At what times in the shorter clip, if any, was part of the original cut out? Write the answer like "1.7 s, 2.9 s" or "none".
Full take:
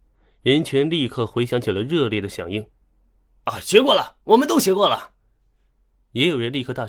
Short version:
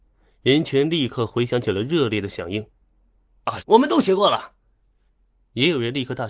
3.6 s